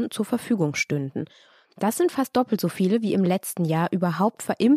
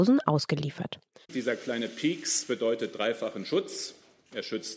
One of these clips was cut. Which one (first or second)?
second